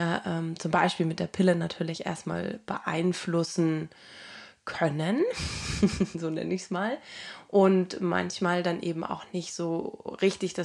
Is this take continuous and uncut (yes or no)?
yes